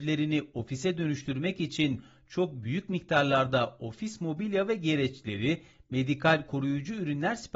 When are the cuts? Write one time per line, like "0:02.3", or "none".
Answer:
none